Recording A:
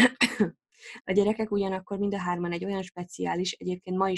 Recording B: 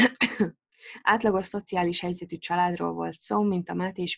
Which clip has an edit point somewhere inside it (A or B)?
A